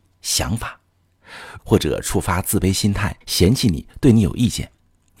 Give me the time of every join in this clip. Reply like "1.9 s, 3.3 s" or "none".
1.6 s, 3.2 s